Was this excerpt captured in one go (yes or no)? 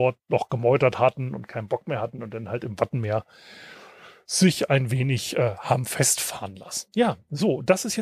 yes